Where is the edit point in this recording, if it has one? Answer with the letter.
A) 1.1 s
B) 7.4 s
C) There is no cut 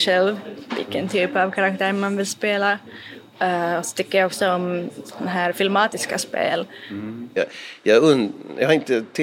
B